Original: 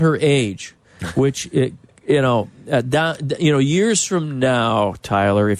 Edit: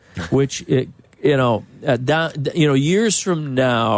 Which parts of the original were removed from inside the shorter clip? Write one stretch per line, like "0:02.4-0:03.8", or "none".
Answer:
none